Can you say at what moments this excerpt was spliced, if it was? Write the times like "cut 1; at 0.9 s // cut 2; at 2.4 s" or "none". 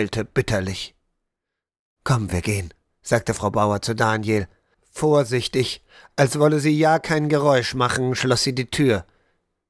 none

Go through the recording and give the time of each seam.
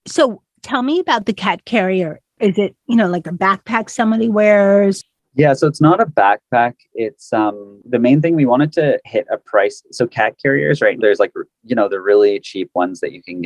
cut 1; at 11.0 s

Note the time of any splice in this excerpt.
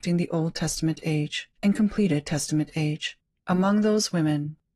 cut 1; at 1.6 s // cut 2; at 3.4 s

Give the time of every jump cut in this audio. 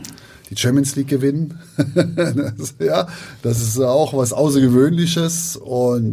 none

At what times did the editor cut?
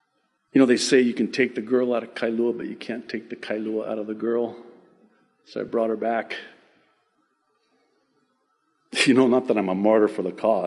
none

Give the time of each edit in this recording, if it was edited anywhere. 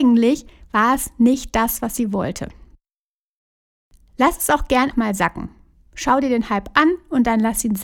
cut 1; at 4.9 s

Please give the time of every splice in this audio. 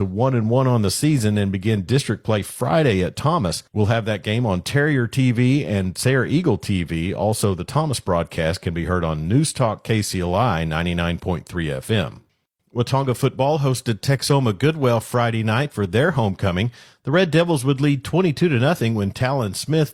none

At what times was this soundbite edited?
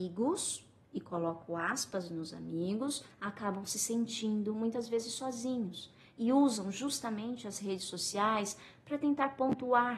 cut 1; at 3.1 s

